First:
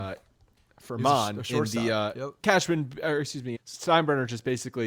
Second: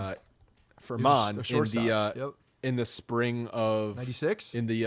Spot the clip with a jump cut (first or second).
first